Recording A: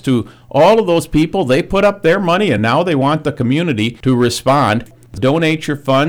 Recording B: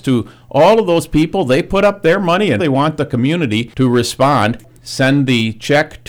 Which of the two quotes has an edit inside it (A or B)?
B